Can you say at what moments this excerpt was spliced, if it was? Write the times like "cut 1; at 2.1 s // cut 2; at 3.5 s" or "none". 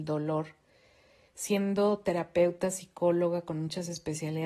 cut 1; at 1.3 s